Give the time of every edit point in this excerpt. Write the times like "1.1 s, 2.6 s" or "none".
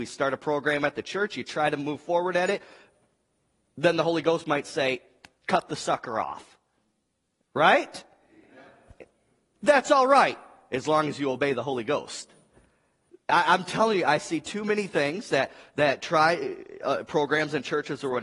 none